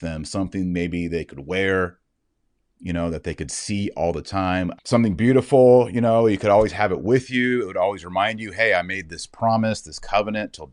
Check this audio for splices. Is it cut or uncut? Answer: cut